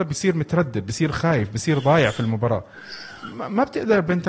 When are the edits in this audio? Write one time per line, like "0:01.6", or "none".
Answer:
none